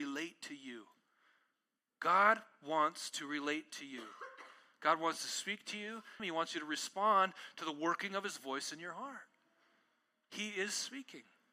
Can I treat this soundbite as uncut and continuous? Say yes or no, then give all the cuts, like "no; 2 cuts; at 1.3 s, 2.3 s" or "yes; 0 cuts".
no; 1 cut; at 6.2 s